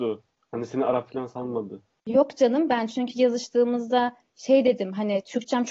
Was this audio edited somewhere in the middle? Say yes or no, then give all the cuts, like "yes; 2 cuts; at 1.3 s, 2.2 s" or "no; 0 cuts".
yes; 1 cut; at 2.0 s